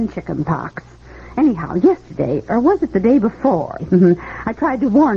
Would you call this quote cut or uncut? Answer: cut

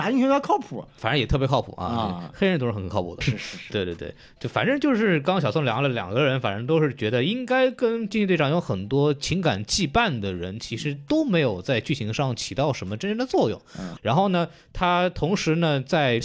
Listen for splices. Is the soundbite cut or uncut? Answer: cut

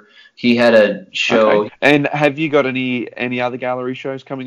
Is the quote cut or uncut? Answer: cut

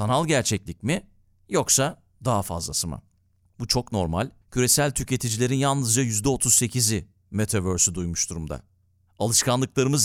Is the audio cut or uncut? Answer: cut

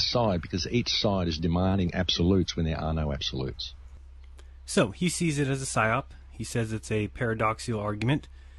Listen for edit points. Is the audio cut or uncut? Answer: uncut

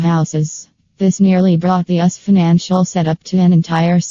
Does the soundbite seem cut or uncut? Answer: uncut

